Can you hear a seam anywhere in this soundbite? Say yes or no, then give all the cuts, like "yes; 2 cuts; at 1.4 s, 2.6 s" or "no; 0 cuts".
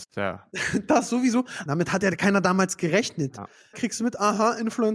yes; 2 cuts; at 1.7 s, 3.7 s